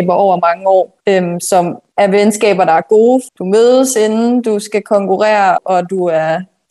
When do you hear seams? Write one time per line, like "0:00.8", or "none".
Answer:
0:03.3
0:05.6